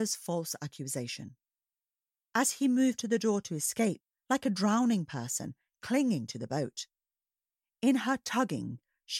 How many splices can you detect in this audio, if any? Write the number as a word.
two